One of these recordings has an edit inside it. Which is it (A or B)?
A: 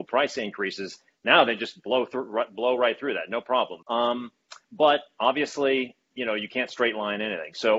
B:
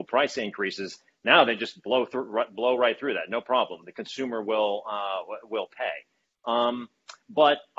A